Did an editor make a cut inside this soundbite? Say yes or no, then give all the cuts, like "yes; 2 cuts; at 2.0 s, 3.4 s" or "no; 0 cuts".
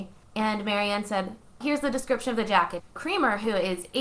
yes; 2 cuts; at 1.6 s, 2.8 s